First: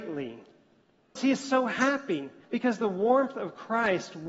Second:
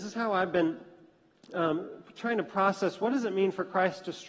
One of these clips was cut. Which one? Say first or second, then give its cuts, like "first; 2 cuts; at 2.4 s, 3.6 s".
first; 2 cuts; at 1.2 s, 2.4 s